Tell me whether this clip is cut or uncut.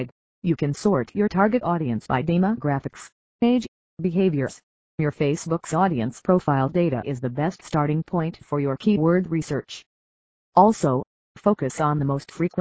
cut